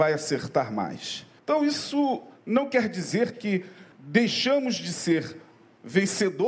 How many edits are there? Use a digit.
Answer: 2